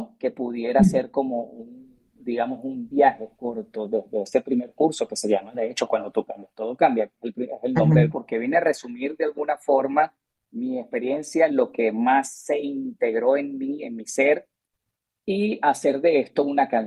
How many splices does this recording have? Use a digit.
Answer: 2